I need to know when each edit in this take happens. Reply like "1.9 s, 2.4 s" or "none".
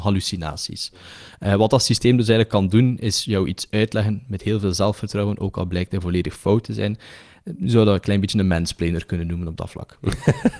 none